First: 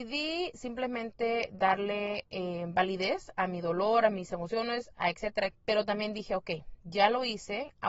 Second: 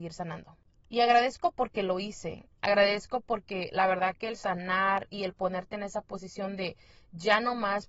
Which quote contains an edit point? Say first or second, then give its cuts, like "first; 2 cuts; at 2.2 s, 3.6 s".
first; 1 cut; at 5.5 s